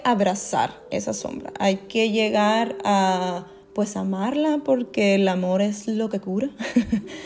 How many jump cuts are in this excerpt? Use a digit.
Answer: 0